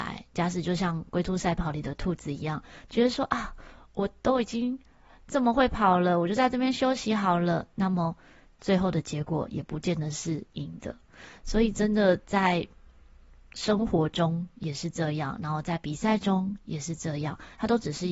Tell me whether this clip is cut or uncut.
uncut